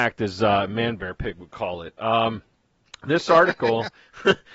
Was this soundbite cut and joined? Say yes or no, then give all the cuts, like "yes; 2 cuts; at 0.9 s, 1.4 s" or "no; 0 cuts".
no; 0 cuts